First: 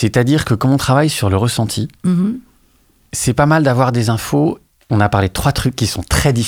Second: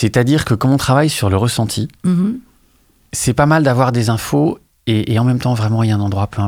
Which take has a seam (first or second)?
first